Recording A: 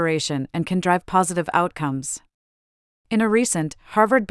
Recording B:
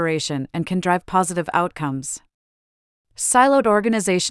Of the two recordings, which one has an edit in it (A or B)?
B